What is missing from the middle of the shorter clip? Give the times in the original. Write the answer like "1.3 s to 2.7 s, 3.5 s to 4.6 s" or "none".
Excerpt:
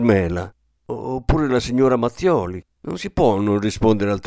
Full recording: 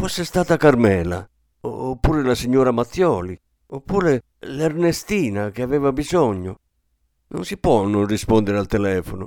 3.5 s to 7.2 s